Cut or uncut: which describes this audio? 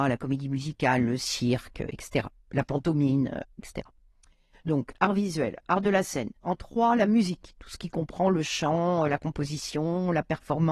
uncut